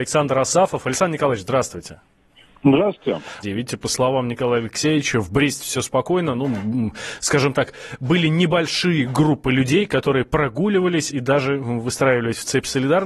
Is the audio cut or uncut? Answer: cut